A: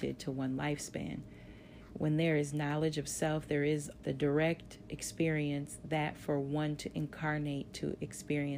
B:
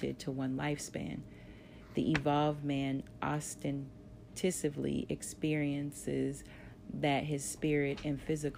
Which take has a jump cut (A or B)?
A